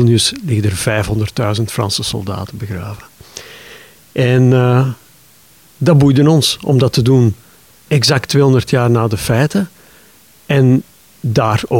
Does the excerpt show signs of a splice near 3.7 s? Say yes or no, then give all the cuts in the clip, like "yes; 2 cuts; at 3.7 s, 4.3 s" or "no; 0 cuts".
no; 0 cuts